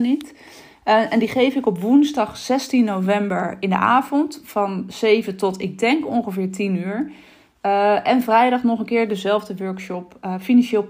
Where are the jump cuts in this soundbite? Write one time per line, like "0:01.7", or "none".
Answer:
none